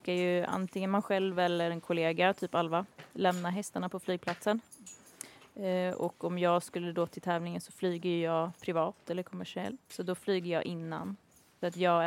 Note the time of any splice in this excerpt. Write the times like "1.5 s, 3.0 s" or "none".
none